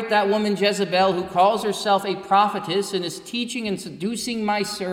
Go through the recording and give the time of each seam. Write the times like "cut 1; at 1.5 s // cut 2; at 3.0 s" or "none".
none